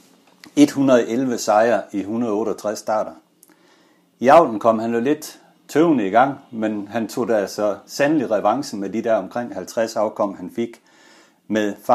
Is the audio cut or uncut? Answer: uncut